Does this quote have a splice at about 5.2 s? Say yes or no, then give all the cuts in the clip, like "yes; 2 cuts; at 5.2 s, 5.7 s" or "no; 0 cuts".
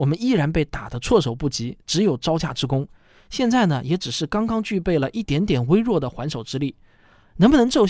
no; 0 cuts